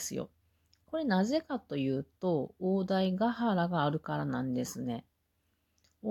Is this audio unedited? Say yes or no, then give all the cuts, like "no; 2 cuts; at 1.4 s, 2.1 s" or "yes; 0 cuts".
yes; 0 cuts